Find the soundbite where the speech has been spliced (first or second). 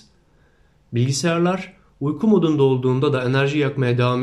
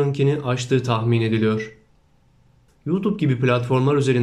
second